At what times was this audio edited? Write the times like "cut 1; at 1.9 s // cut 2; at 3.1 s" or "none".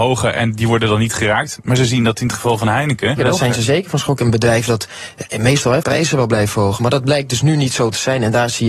cut 1; at 3.2 s // cut 2; at 4.2 s // cut 3; at 5.8 s